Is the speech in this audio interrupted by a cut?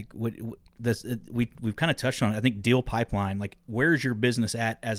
no; 0 cuts

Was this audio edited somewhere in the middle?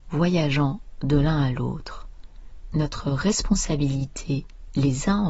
no; 0 cuts

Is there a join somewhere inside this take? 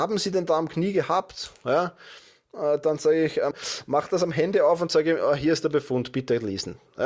yes; 1 cut; at 3.5 s

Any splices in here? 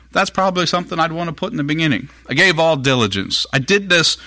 no; 0 cuts

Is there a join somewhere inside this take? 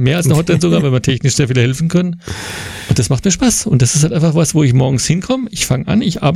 no; 0 cuts

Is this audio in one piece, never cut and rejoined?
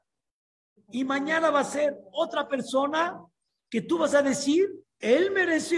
no; 1 cut; at 4.8 s

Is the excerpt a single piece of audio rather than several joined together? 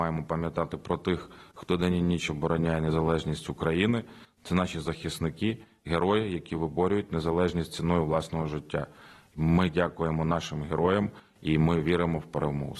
yes; 0 cuts

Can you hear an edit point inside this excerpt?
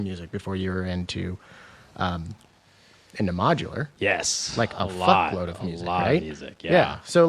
no; 0 cuts

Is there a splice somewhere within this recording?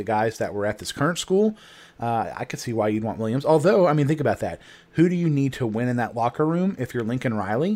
no; 0 cuts

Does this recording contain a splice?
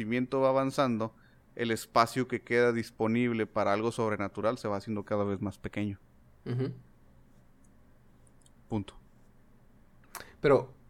no; 0 cuts

